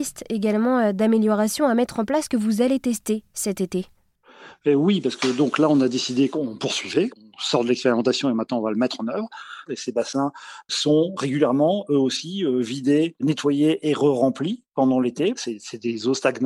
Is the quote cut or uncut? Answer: cut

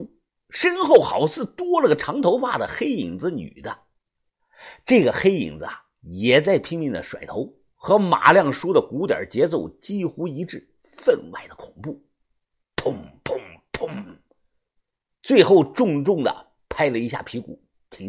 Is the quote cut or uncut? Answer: uncut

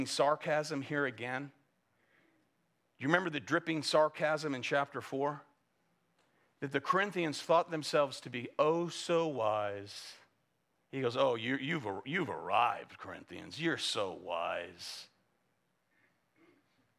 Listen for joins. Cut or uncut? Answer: uncut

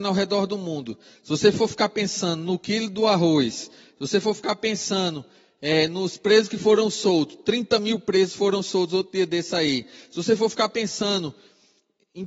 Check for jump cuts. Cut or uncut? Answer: uncut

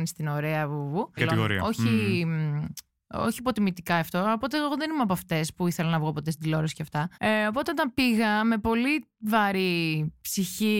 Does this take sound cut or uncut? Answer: cut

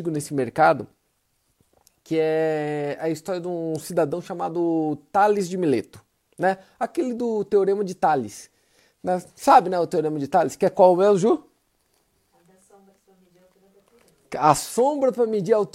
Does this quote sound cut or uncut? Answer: uncut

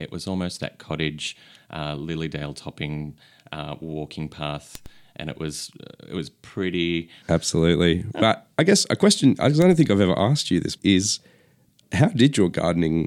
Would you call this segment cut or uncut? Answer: cut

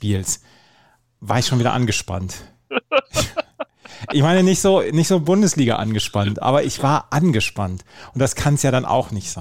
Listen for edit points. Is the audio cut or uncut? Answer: uncut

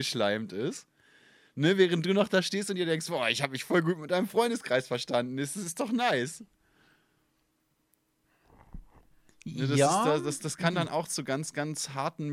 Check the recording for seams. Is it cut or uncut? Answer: uncut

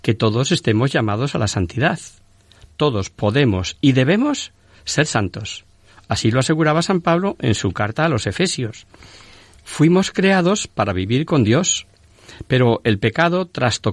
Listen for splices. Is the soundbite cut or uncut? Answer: cut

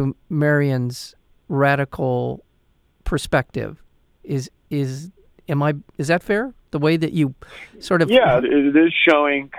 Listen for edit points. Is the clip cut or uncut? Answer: cut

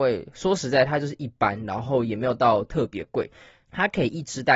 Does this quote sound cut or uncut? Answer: cut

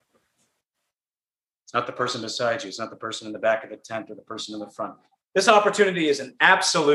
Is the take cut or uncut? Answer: cut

